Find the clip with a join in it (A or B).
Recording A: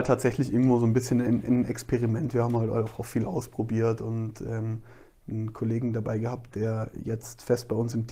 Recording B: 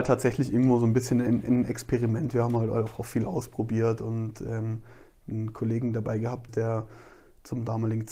B